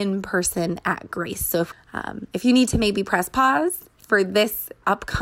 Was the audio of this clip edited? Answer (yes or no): no